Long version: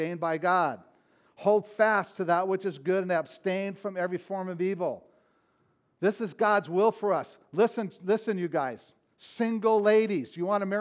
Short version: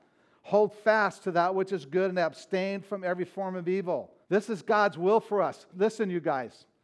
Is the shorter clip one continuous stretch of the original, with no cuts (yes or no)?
no